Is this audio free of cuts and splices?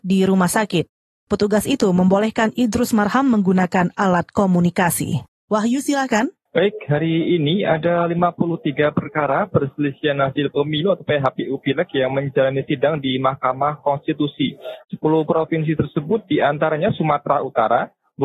no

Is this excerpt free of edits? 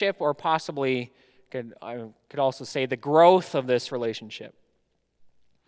yes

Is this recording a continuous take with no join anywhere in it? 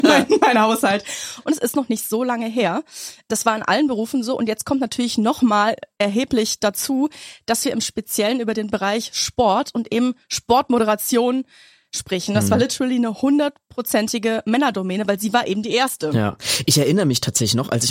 no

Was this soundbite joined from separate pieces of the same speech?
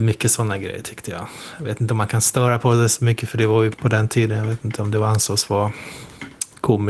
yes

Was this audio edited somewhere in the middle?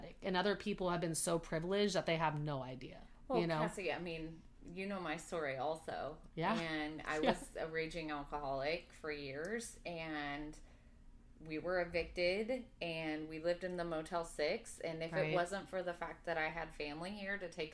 no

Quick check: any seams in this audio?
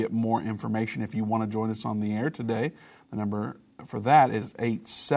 no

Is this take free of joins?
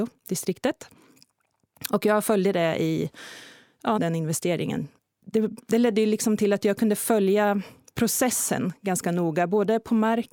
no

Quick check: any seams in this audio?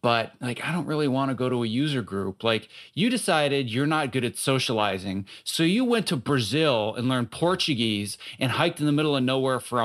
no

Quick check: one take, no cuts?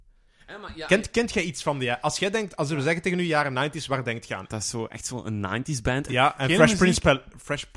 no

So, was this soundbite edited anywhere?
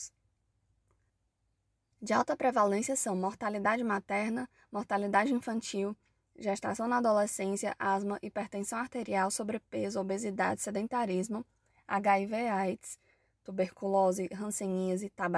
yes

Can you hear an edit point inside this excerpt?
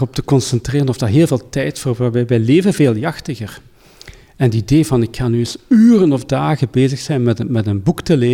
no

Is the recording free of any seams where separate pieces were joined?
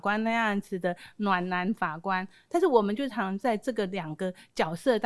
no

